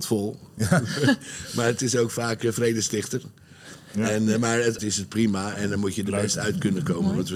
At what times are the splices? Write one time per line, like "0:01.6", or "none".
0:04.8

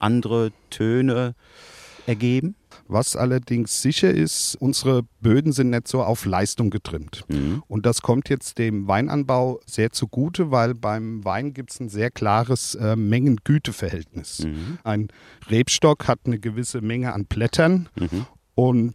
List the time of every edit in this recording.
0:02.7

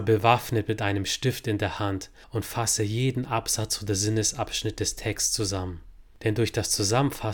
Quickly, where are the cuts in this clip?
none

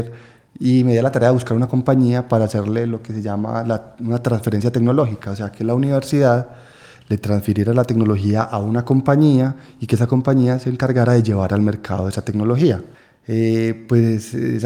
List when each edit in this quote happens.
none

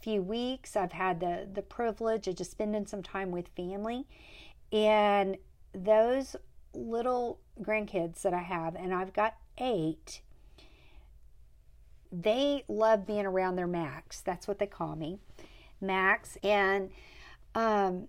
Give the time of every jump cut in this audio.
0:12.1
0:16.4

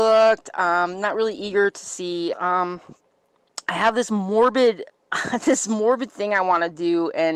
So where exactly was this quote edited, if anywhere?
0:02.3
0:04.9

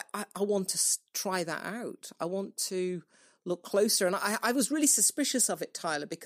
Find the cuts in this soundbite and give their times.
none

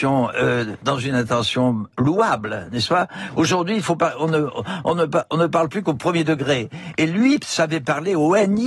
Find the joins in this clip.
none

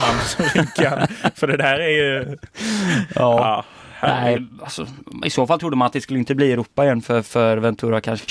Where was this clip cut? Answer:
0:04.4

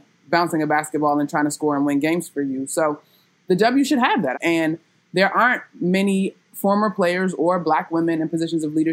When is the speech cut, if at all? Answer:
0:04.3

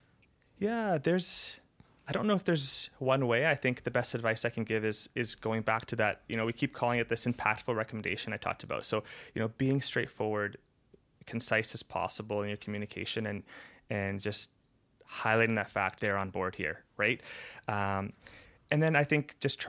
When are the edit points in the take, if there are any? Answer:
0:16.0

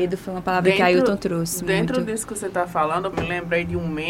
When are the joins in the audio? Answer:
0:03.1

